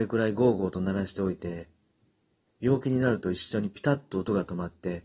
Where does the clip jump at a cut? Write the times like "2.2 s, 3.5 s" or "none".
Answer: 2.5 s